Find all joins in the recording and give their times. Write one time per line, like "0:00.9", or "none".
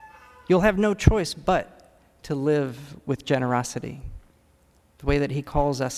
0:04.8